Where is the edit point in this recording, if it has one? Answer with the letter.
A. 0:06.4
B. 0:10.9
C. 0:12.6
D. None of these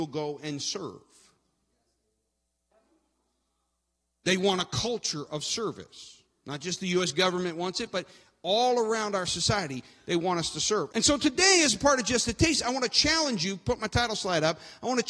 B